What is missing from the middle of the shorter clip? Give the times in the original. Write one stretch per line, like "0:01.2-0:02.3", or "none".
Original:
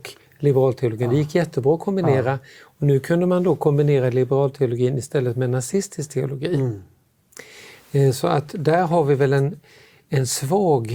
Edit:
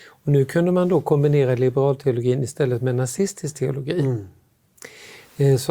none